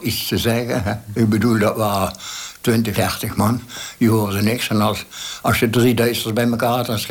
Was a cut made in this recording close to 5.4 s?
no; 1 cut; at 2.9 s

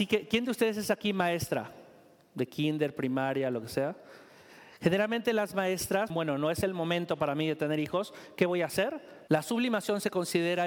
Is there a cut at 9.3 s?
yes; 2 cuts; at 6.1 s, 9.3 s

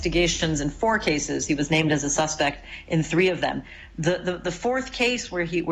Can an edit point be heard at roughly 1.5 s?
no; 0 cuts

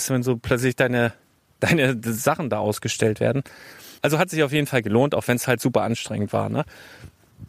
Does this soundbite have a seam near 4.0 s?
yes; 1 cut; at 4.0 s

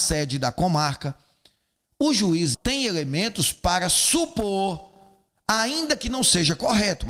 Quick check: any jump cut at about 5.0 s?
no; 1 cut; at 2.5 s

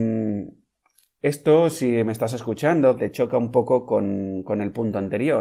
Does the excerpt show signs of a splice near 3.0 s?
yes; 1 cut; at 3.0 s

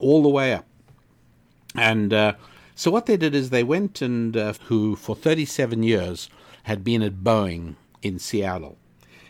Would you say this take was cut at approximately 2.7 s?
no; 1 cut; at 4.5 s

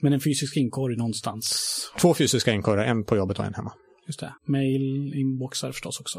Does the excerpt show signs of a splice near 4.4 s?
yes; 1 cut; at 4.4 s

